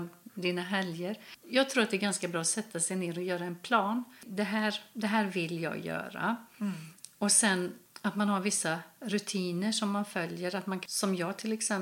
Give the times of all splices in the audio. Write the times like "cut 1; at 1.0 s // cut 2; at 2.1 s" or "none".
none